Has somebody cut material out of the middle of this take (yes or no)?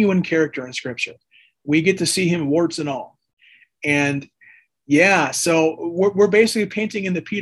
no